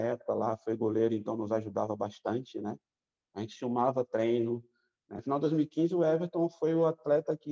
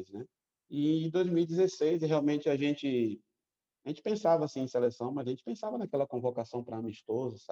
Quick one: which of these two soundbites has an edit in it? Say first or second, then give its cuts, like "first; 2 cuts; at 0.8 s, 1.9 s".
first; 1 cut; at 5.2 s